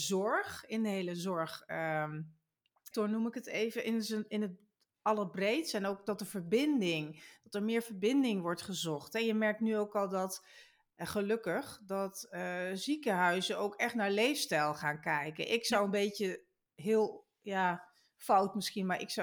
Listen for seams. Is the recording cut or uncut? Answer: cut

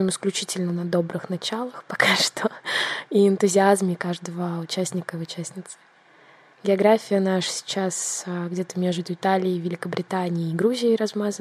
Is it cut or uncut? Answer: uncut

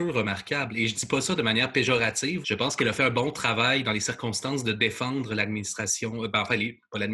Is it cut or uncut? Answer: cut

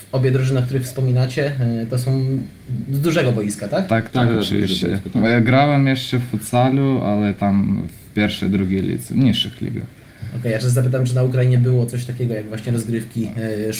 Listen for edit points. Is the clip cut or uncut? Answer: cut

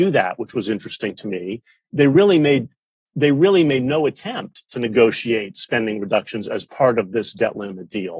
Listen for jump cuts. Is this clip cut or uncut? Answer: uncut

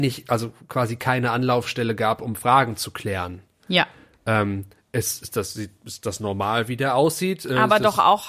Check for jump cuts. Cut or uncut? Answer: uncut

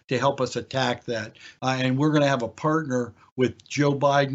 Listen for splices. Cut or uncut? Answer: cut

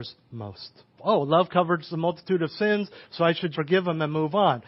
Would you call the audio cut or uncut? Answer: cut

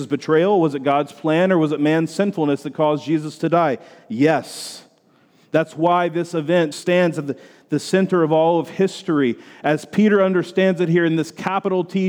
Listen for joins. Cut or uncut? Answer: cut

